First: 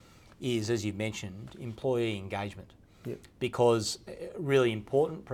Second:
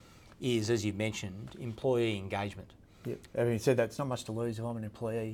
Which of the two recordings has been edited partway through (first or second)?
second